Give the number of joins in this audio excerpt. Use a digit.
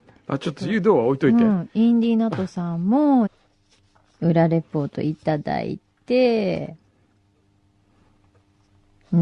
1